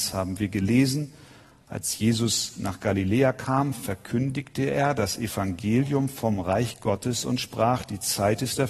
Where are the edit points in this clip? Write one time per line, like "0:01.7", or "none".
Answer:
none